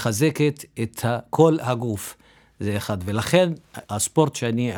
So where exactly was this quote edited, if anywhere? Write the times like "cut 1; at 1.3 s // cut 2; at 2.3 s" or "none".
cut 1; at 3.8 s